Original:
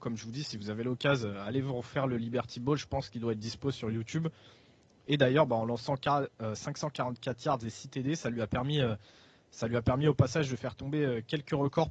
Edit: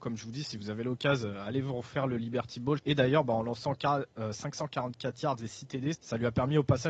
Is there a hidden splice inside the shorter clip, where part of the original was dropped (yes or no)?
yes